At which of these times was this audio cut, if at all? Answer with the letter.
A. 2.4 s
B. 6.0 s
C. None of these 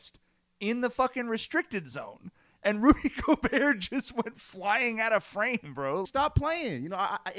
B